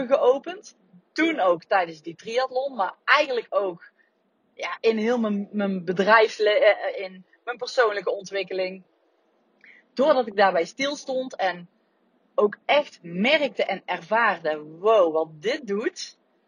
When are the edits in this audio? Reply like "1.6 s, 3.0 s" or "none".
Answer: 6.9 s

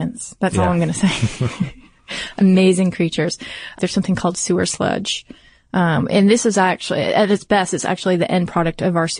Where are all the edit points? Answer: 3.7 s

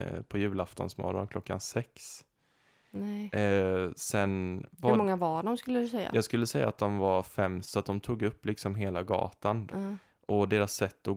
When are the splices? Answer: 7.6 s, 9.7 s

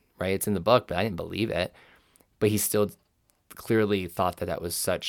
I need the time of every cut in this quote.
none

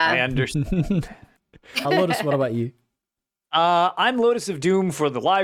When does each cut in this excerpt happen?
1.8 s

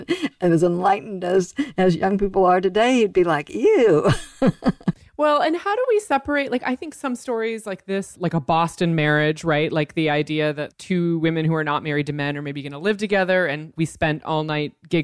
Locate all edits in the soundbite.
none

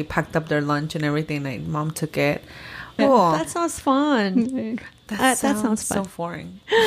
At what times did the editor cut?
3.0 s

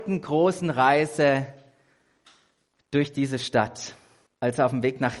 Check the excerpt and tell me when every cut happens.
4.3 s

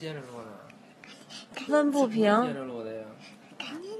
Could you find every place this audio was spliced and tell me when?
1.7 s

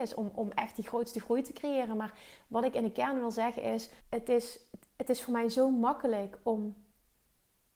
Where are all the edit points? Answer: 4.0 s

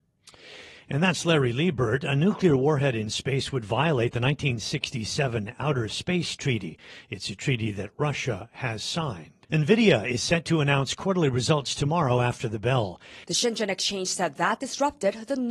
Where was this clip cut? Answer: 9.4 s, 13.2 s

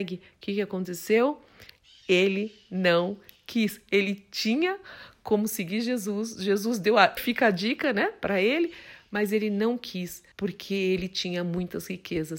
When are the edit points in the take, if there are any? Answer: 7.2 s, 10.3 s

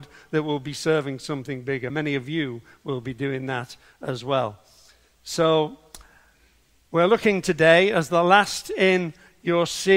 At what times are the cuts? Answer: none

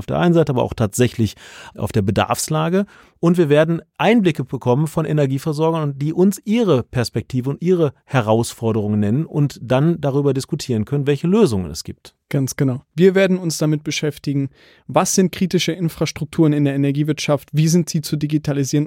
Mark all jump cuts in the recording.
none

